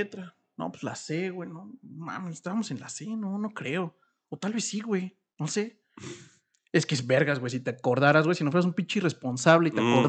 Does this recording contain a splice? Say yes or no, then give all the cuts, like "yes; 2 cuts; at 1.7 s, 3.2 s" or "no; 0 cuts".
no; 0 cuts